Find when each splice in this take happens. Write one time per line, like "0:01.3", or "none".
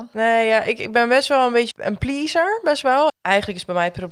0:01.7
0:03.1